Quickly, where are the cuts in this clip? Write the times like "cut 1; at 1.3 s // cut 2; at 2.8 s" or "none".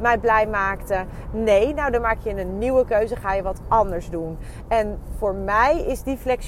cut 1; at 1.3 s